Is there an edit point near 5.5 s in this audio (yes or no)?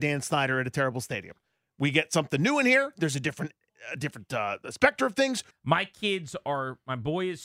yes